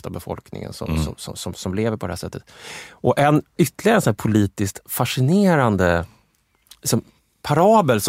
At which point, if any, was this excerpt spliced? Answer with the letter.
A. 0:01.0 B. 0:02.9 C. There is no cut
C